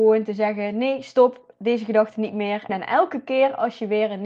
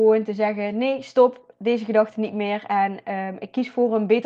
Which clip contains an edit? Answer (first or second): first